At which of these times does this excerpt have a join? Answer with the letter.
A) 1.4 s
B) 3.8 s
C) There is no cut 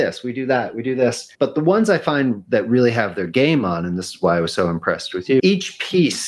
C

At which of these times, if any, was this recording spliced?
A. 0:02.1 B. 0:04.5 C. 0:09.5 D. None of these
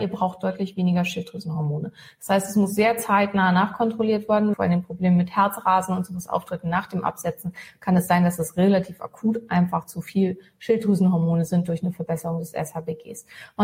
B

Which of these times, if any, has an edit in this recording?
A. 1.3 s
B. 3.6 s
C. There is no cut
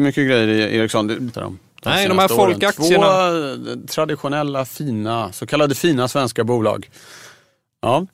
A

